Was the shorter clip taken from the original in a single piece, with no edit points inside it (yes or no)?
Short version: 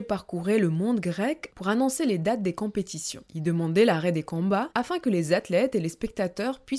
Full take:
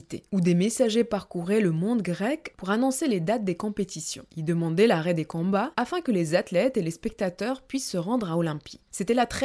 yes